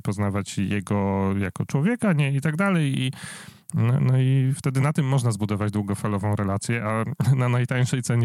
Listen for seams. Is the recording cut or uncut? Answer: cut